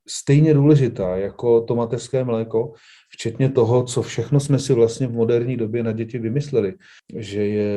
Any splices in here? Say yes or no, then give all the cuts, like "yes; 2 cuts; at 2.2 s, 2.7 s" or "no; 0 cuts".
no; 0 cuts